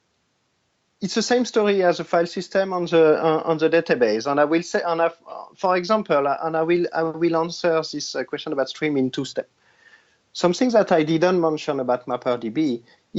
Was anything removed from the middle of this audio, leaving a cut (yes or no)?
no